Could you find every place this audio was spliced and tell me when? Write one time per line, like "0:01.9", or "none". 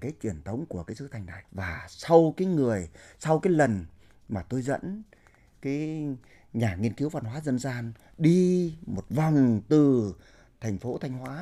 0:01.4